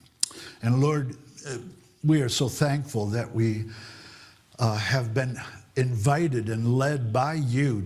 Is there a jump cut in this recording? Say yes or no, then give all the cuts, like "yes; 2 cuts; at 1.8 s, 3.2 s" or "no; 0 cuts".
no; 0 cuts